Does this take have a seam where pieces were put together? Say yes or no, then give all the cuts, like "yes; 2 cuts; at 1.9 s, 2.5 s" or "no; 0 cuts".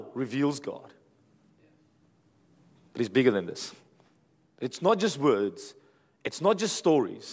no; 0 cuts